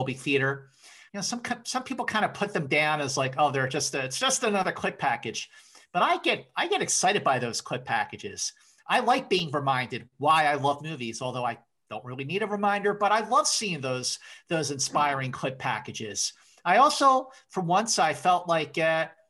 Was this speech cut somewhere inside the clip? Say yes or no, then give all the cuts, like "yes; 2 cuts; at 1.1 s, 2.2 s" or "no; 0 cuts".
yes; 1 cut; at 1.1 s